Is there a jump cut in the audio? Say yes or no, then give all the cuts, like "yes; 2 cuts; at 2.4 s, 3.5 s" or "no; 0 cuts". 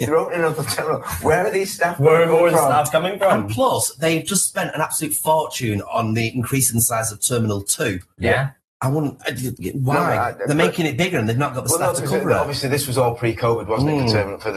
no; 0 cuts